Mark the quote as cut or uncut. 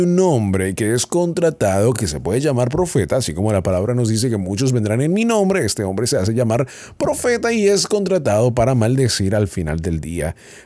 uncut